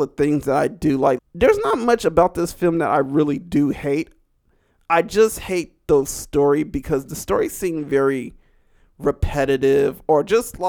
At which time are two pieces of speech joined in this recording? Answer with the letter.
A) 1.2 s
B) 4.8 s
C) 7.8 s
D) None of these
A